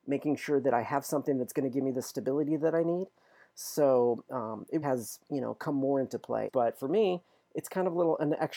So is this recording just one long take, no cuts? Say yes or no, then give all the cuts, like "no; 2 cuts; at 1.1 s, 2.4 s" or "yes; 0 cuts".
no; 2 cuts; at 4.8 s, 6.5 s